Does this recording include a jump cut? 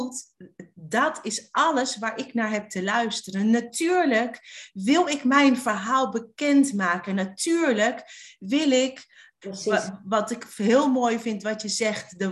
yes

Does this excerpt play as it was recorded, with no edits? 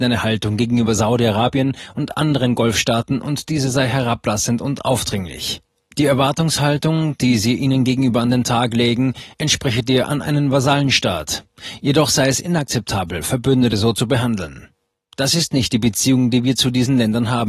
yes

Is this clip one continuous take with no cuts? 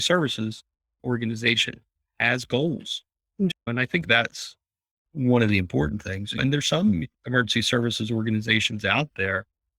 no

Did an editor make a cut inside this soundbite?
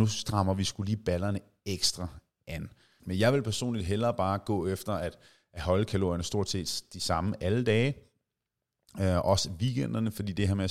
yes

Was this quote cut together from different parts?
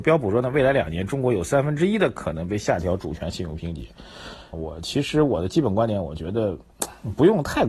yes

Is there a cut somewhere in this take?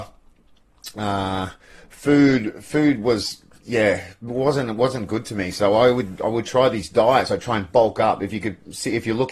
no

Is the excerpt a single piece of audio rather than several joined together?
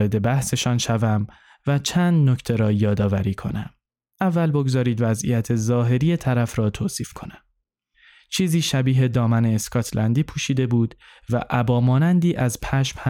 yes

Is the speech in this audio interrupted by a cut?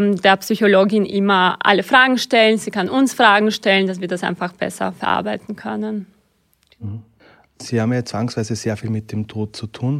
no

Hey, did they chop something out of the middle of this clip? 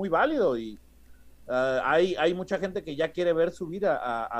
no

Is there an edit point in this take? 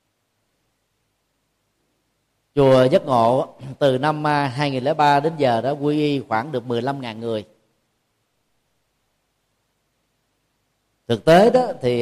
no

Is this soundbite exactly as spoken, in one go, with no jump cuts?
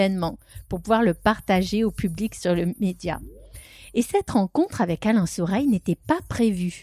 yes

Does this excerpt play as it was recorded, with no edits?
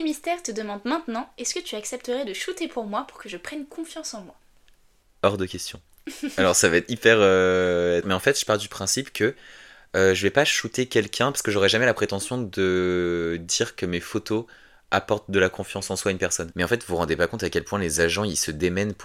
no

